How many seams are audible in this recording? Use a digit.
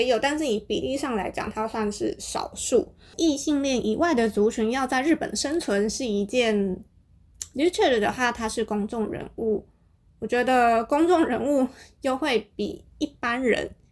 1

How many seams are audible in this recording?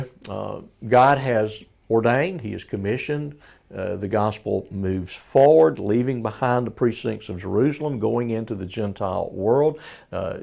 0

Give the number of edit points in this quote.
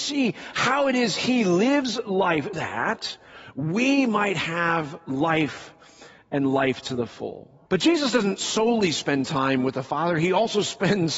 2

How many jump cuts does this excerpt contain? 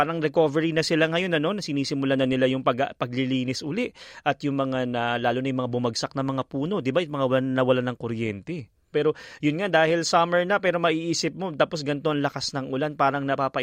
1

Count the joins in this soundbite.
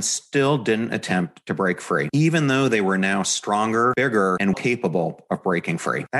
1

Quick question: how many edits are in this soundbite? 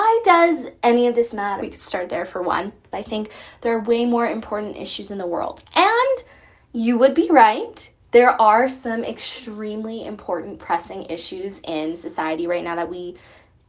2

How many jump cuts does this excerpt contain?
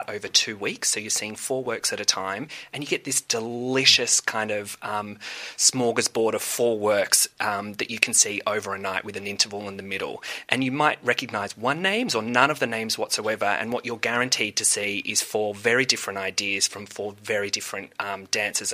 1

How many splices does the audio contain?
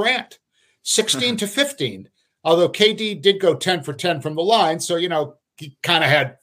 0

